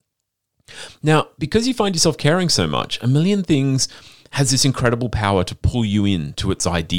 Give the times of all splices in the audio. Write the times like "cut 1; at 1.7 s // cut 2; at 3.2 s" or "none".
none